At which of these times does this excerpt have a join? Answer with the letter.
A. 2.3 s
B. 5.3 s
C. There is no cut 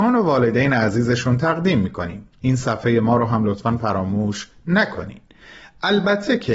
A